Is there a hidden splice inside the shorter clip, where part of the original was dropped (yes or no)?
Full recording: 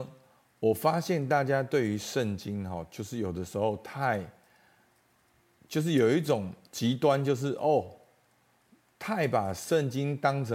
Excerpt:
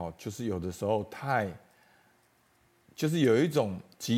no